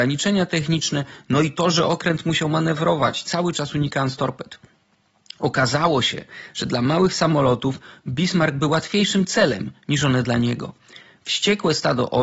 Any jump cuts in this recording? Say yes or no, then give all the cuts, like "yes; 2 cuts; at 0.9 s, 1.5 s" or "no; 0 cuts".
no; 0 cuts